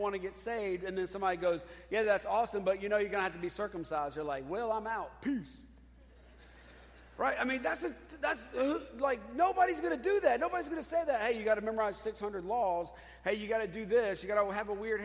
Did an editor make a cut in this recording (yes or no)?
no